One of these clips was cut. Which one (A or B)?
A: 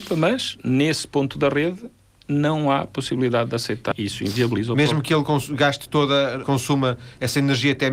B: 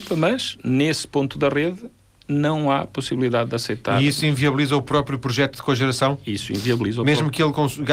A